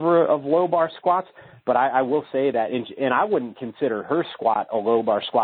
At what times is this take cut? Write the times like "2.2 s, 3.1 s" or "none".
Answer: none